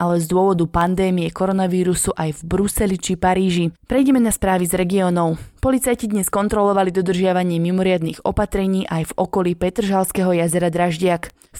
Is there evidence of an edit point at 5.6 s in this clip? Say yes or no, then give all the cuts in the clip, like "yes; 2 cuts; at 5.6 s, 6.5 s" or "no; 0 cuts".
no; 1 cut; at 3.8 s